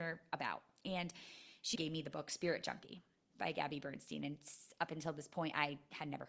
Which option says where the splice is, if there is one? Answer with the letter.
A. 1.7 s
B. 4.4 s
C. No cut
A